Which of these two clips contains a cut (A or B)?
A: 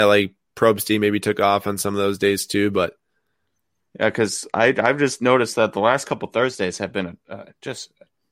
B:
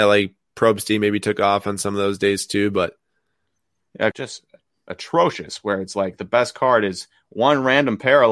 B